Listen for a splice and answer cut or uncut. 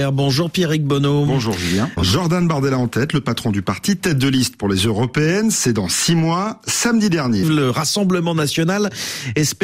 cut